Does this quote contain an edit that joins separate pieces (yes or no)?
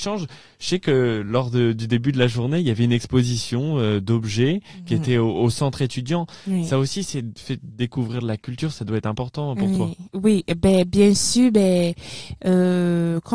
no